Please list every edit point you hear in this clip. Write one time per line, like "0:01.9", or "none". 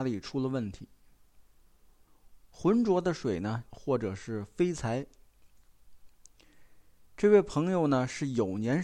0:02.4
0:03.7